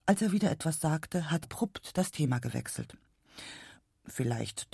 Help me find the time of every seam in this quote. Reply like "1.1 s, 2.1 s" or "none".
1.4 s